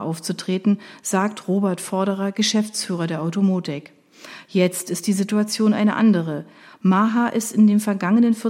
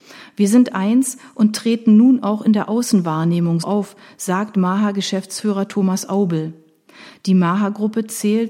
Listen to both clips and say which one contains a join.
second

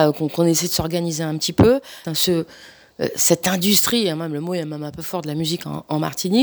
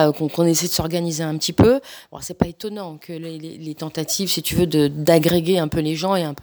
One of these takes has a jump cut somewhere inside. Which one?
first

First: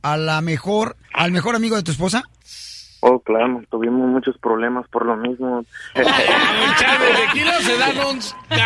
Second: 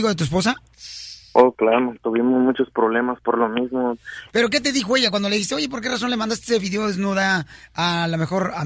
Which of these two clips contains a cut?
first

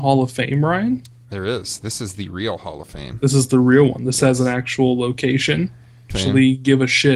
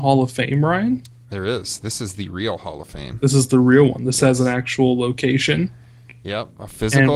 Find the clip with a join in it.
first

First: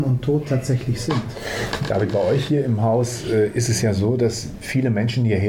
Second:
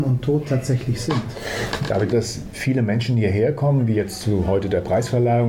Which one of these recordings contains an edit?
second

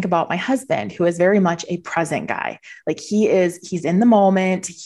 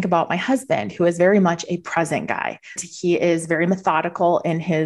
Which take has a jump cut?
second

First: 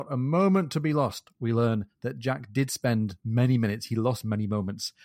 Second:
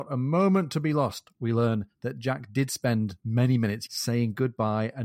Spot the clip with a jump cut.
second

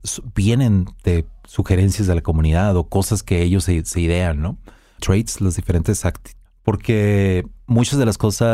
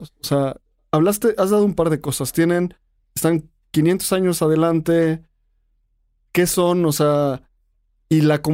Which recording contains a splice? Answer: first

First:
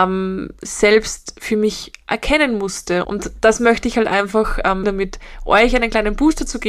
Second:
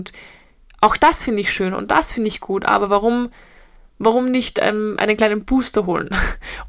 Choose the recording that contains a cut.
first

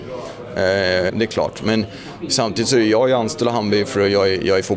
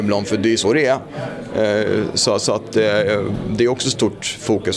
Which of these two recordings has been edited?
first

